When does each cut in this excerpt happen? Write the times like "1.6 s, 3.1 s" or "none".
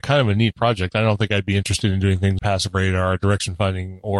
2.4 s